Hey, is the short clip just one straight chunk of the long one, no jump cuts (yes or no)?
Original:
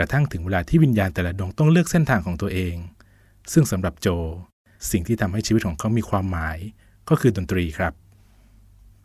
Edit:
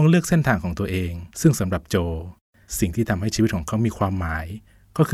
no